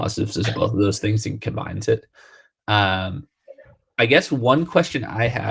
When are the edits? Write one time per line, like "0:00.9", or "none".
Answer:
none